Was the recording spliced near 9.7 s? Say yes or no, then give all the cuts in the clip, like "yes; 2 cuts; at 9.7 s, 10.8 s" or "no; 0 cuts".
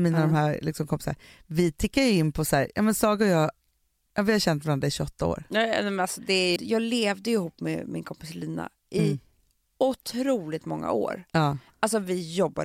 no; 1 cut; at 6.6 s